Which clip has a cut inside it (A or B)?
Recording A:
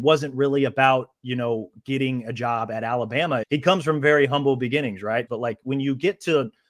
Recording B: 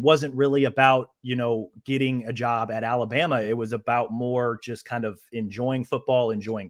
A